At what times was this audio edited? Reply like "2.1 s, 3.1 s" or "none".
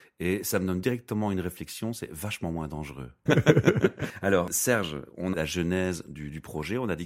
3.3 s, 5.3 s